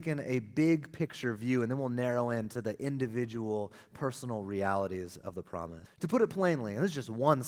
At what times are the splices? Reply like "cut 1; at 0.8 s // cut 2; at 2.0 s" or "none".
cut 1; at 5.9 s

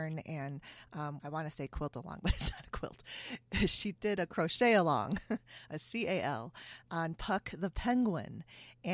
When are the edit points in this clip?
cut 1; at 1.2 s

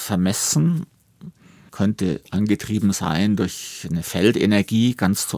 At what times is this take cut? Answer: cut 1; at 1.7 s

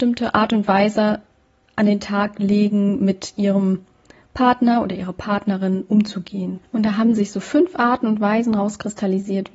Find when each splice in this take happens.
cut 1; at 6.7 s

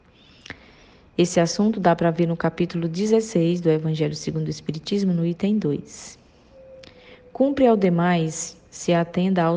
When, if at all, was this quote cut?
none

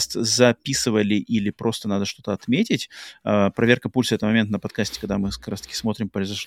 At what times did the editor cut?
none

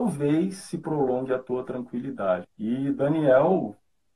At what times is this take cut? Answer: cut 1; at 2.4 s

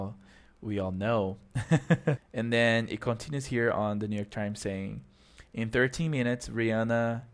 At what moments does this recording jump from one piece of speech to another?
cut 1; at 2.2 s

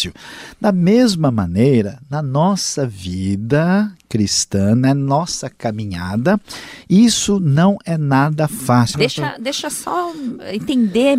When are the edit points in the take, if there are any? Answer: cut 1; at 8.9 s

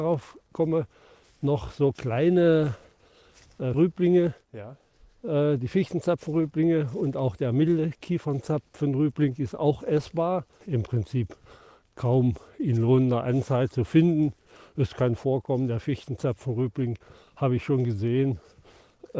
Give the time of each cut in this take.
cut 1; at 3.7 s // cut 2; at 10.6 s

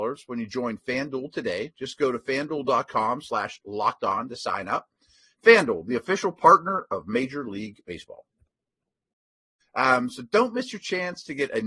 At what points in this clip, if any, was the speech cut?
cut 1; at 9.6 s

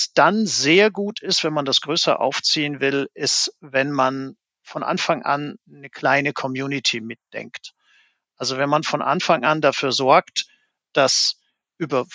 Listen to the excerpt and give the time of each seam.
none

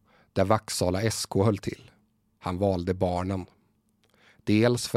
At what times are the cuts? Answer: cut 1; at 2.4 s

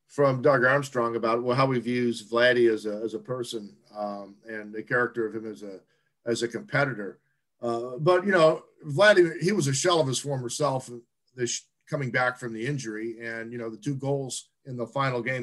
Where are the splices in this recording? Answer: none

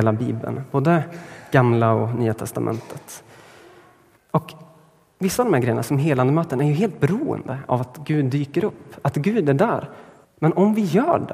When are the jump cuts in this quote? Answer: cut 1; at 4.2 s // cut 2; at 10.2 s

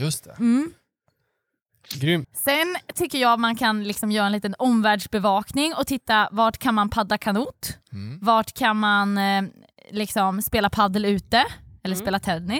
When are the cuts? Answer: cut 1; at 2.2 s

